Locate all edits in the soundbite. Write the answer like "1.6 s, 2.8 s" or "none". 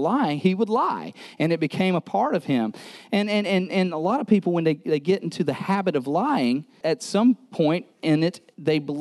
6.8 s